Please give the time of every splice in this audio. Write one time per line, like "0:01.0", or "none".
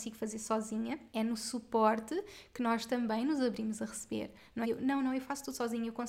0:01.1
0:04.6